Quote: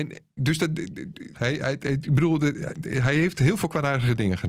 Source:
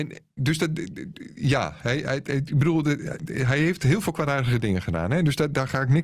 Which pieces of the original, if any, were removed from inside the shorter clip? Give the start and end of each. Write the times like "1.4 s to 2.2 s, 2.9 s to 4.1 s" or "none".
1.3 s to 1.8 s